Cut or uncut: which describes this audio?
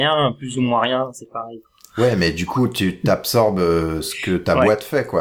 uncut